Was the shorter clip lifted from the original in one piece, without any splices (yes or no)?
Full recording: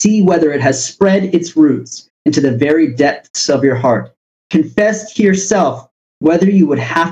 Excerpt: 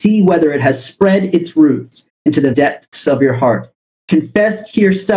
no